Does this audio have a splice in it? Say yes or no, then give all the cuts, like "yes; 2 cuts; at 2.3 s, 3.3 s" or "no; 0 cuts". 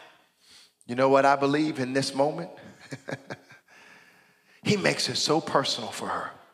no; 0 cuts